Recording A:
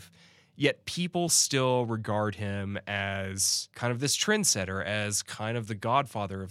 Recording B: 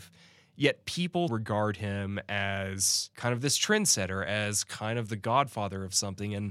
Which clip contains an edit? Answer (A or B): B